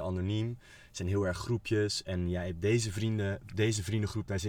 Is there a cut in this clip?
no; 0 cuts

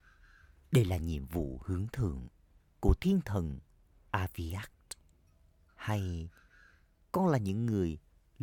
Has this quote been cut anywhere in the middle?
yes; 1 cut; at 5.7 s

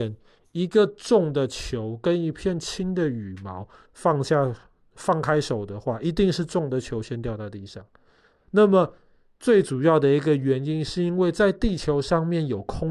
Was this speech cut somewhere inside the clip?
no; 0 cuts

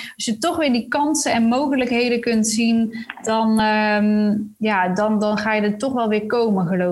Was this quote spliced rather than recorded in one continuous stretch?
no; 0 cuts

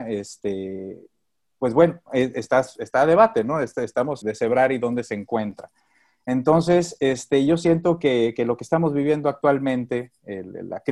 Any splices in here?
yes; 1 cut; at 4.2 s

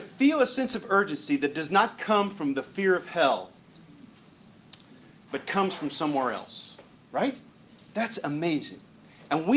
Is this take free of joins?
no; 1 cut; at 6.9 s

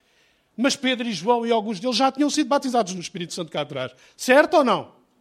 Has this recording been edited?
no; 0 cuts

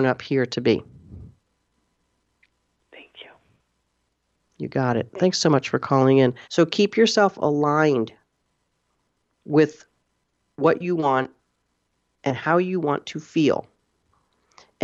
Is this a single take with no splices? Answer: no; 1 cut; at 6.4 s

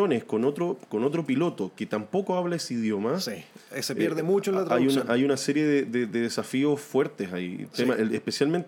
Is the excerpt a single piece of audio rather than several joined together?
yes; 0 cuts

